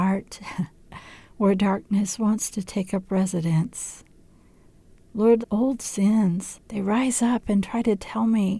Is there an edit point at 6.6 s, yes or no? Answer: yes